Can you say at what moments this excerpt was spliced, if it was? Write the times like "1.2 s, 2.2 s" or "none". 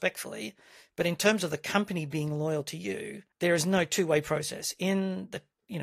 3.3 s